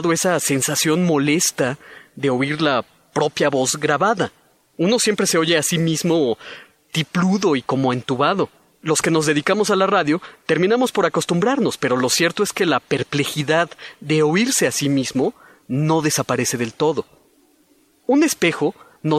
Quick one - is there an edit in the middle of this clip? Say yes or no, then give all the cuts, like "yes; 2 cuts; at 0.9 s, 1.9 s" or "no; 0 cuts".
no; 0 cuts